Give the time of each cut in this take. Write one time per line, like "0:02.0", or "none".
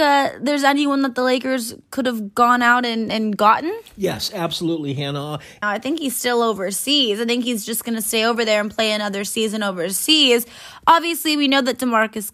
0:05.6